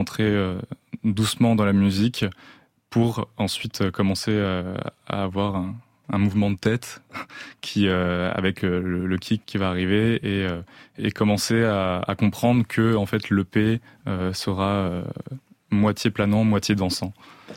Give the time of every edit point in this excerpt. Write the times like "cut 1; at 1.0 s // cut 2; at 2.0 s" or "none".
none